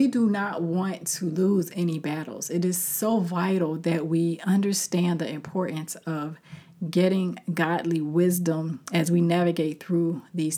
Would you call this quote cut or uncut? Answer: uncut